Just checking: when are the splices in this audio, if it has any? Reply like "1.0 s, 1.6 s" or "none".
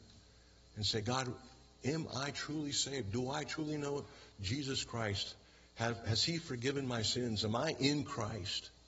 none